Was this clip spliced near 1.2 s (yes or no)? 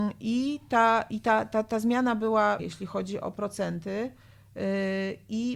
no